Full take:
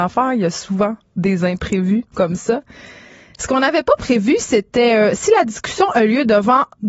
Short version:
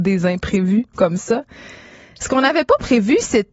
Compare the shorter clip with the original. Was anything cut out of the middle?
no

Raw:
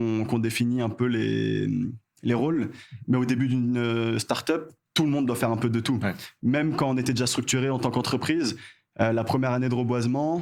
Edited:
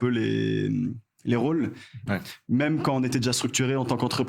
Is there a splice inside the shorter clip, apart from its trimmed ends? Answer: yes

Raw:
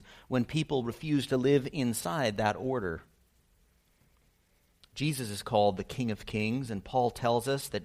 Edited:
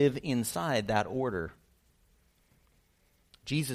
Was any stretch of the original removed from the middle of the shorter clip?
no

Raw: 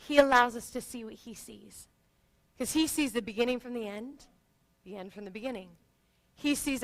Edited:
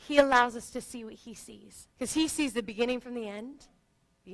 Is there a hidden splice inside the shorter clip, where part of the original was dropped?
yes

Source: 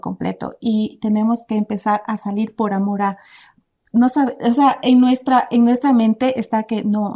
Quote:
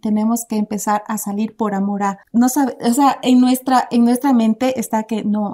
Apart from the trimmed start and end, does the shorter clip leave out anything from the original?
yes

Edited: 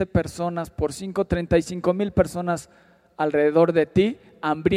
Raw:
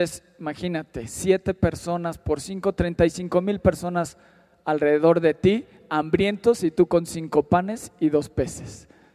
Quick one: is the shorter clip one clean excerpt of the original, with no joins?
yes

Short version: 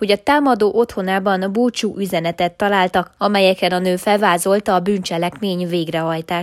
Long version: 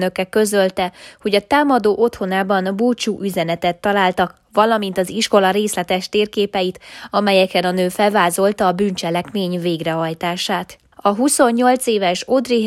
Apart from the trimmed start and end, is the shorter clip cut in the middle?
yes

